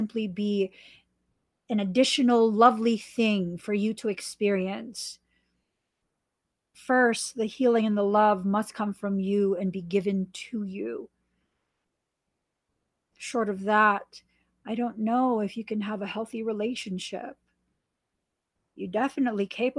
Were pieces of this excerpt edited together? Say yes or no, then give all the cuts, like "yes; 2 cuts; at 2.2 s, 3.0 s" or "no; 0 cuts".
no; 0 cuts